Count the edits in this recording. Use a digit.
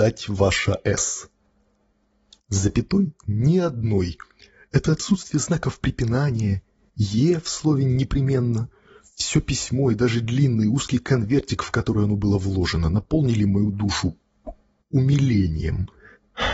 0